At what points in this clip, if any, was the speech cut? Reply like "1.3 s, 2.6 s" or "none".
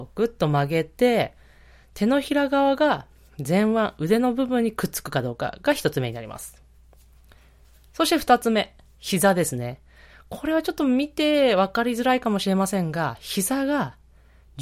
none